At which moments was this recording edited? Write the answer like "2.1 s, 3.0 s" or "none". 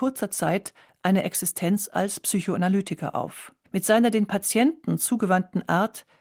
3.6 s